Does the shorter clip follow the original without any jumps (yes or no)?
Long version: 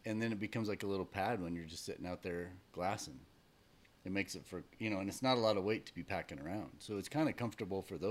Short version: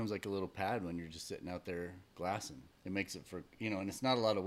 no